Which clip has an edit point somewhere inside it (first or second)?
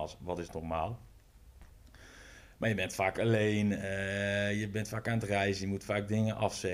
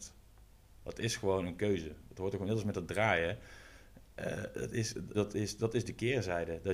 second